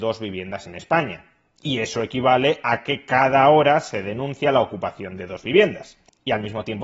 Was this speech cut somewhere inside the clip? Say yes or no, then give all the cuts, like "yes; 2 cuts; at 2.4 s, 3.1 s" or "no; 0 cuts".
yes; 1 cut; at 1.6 s